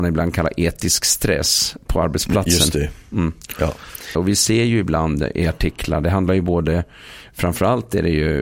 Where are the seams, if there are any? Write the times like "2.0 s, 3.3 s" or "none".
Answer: 4.1 s